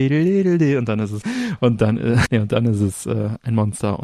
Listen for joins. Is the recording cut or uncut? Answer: cut